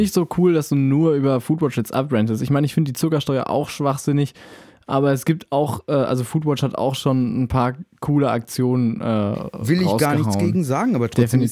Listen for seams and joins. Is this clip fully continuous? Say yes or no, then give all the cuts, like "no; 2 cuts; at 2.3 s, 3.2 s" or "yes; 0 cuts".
yes; 0 cuts